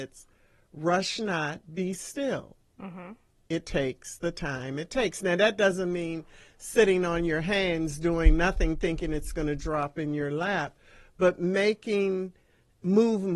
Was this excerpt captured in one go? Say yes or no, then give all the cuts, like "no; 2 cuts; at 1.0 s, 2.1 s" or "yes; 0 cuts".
no; 1 cut; at 1.6 s